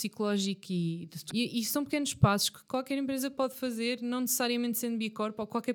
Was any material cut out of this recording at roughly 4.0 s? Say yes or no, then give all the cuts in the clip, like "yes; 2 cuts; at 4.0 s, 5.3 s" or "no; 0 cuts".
no; 1 cut; at 1.3 s